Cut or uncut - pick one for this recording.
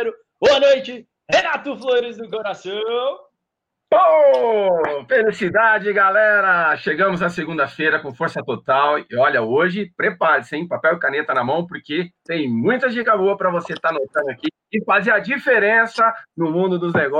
uncut